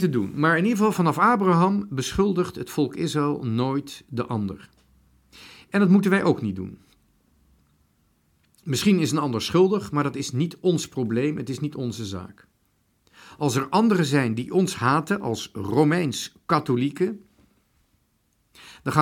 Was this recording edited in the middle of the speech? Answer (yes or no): no